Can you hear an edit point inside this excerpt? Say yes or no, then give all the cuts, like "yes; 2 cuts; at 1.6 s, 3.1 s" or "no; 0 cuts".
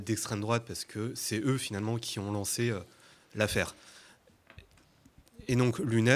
no; 0 cuts